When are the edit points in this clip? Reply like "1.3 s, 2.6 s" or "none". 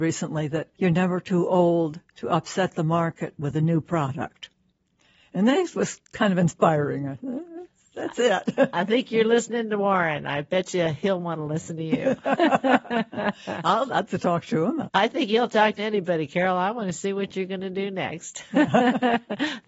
14.1 s